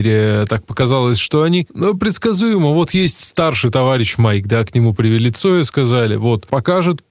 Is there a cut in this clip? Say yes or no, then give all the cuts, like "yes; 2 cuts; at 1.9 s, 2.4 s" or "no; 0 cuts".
no; 0 cuts